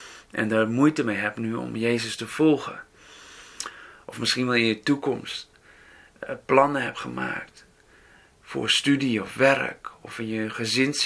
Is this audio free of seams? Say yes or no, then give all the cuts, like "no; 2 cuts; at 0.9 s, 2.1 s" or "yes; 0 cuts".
yes; 0 cuts